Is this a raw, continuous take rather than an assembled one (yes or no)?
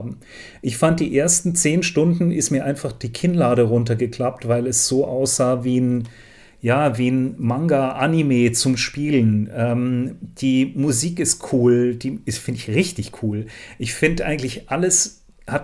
yes